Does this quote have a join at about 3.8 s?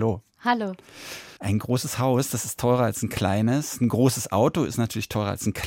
no; 1 cut; at 1.4 s

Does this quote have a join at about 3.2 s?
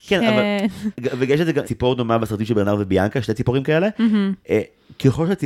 no; 1 cut; at 1.6 s

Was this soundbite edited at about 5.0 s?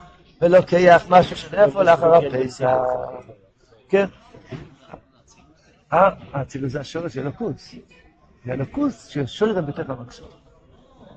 no; 0 cuts

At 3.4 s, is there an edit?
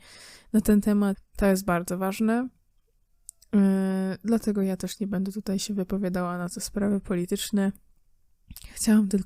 no; 1 cut; at 1.1 s

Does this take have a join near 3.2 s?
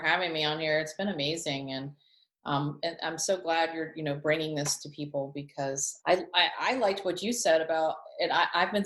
no; 1 cut; at 6.0 s

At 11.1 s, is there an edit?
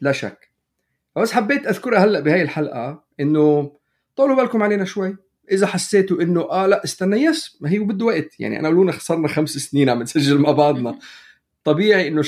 no; 0 cuts

